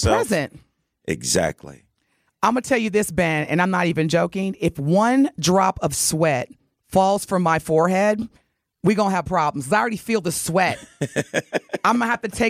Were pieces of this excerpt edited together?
no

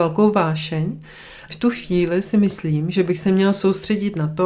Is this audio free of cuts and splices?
no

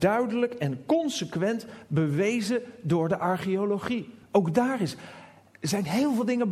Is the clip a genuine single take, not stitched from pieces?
yes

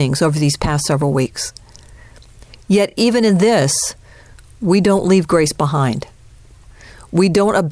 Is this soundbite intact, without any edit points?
yes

